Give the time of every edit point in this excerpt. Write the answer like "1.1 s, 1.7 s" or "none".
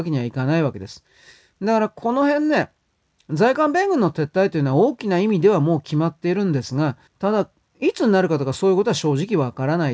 7.1 s